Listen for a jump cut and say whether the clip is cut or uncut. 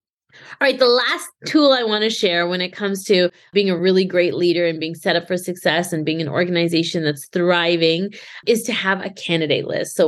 uncut